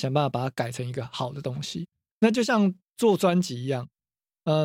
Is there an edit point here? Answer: yes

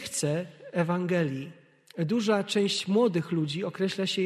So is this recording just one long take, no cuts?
yes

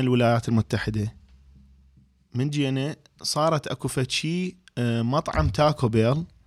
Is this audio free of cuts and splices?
yes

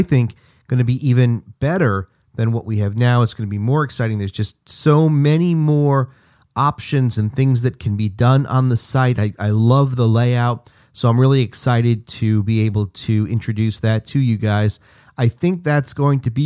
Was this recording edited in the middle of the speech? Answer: no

